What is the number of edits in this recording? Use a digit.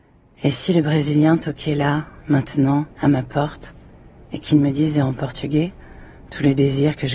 1